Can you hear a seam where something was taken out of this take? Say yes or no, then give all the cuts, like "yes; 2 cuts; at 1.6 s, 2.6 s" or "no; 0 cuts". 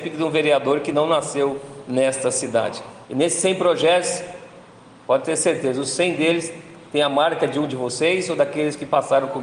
yes; 1 cut; at 3.0 s